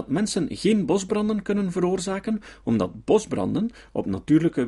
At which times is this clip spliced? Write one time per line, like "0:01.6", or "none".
none